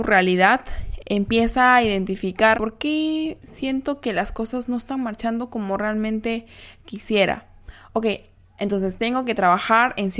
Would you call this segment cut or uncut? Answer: cut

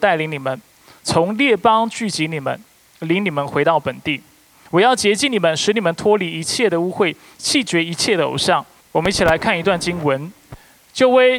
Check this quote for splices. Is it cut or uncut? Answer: cut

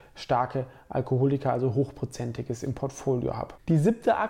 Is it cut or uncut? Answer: uncut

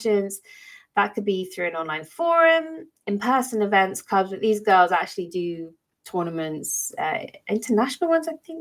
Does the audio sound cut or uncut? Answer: uncut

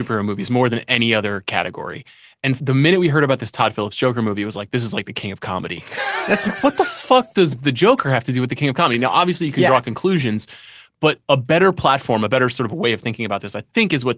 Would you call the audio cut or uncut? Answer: cut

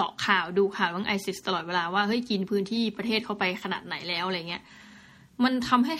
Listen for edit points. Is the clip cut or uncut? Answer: uncut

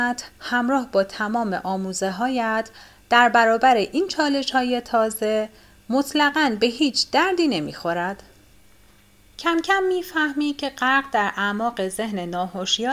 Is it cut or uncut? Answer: uncut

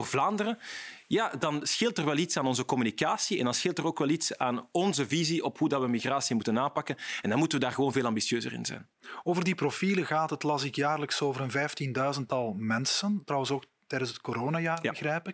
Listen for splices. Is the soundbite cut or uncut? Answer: uncut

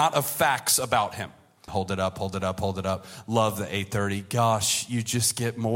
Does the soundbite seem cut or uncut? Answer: cut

